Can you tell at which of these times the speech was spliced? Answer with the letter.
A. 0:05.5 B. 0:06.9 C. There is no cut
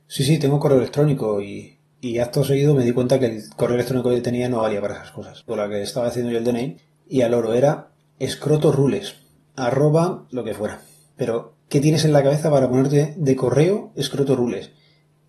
A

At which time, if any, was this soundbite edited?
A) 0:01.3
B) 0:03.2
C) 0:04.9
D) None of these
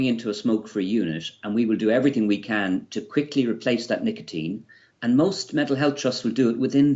D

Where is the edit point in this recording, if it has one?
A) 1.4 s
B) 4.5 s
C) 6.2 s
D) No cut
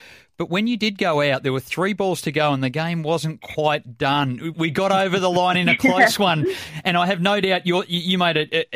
B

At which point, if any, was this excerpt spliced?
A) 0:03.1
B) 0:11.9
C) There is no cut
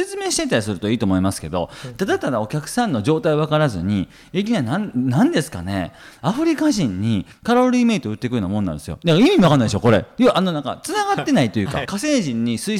B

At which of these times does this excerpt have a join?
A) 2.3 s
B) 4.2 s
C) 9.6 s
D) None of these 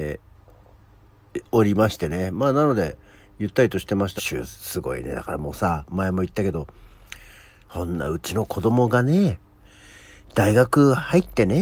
B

